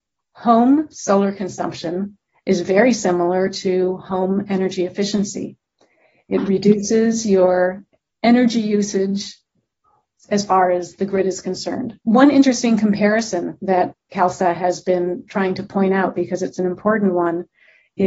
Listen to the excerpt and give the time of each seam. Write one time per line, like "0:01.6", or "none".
0:12.0